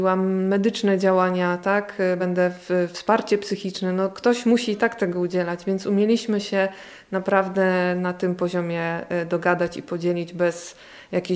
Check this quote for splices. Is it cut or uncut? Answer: uncut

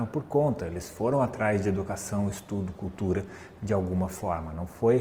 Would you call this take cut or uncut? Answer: uncut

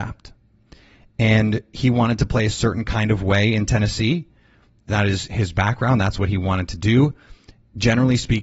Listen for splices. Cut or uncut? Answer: uncut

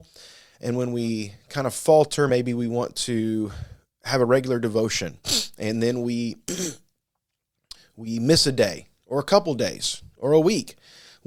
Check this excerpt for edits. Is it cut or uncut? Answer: uncut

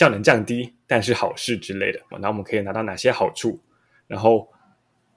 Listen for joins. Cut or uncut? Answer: cut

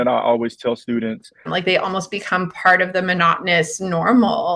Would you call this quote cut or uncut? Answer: cut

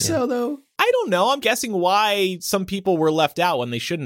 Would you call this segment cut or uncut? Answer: cut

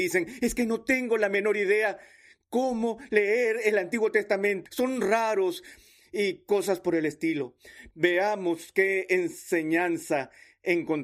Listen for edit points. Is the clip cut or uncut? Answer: cut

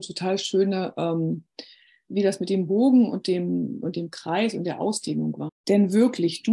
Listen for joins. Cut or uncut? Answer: cut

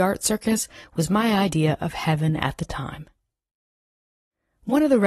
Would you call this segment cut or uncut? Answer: uncut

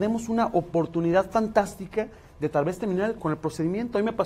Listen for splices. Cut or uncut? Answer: cut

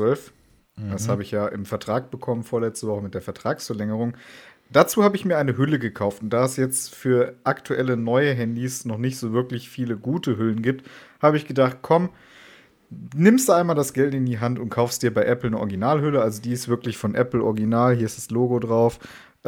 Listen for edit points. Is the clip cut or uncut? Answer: uncut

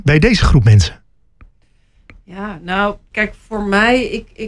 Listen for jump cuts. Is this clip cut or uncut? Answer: cut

